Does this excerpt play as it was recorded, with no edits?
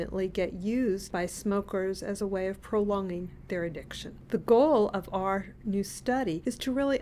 yes; 0 cuts

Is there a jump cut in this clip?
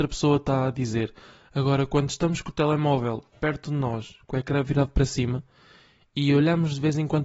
no; 0 cuts

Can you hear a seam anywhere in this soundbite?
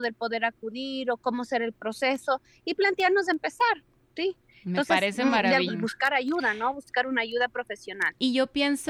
yes; 1 cut; at 5.7 s

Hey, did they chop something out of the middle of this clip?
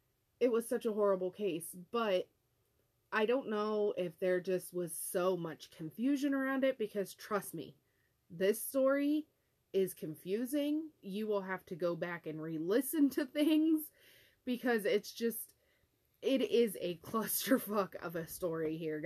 yes; 1 cut; at 11.0 s

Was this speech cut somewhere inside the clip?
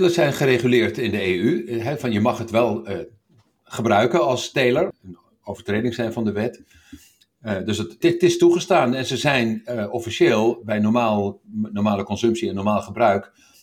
yes; 2 cuts; at 4.9 s, 8.0 s

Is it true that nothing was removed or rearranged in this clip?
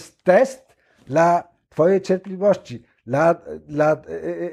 yes; 0 cuts

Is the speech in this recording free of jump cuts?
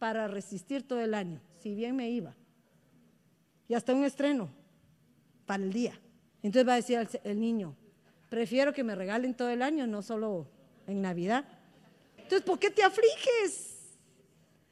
no; 2 cuts; at 6.3 s, 12.2 s

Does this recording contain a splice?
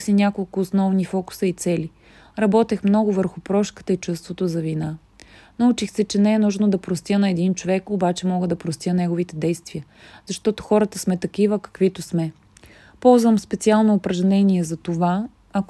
no; 0 cuts

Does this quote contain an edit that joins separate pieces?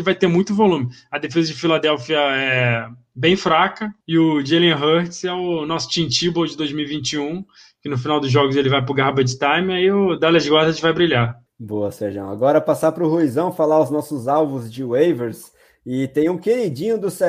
yes; 1 cut; at 4.0 s

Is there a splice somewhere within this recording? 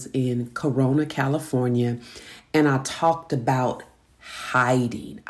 no; 0 cuts

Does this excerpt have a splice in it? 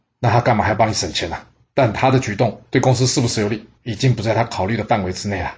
yes; 2 cuts; at 1.6 s, 3.8 s

